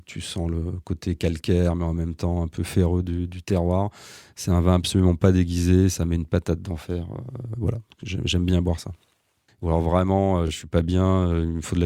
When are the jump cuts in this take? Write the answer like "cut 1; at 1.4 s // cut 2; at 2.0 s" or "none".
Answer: none